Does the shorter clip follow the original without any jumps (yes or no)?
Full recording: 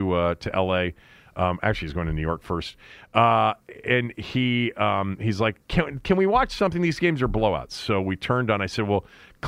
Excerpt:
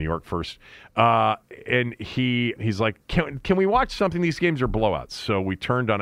no